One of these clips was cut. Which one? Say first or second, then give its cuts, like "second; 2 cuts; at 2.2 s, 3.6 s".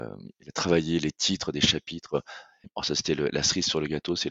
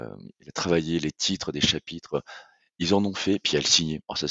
first; 1 cut; at 2.6 s